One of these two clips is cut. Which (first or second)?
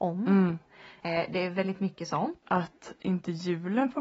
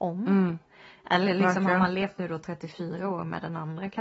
first